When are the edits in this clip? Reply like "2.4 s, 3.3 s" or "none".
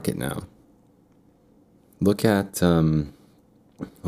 none